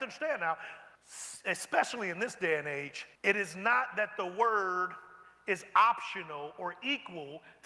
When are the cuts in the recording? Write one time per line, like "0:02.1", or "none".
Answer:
0:01.0
0:03.2